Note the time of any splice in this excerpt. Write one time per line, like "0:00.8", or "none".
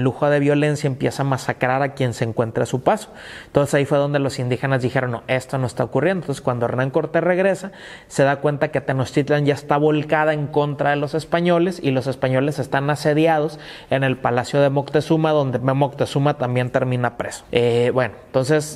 0:17.4